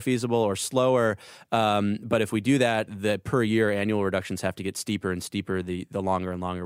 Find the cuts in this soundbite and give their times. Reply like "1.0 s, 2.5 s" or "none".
2.9 s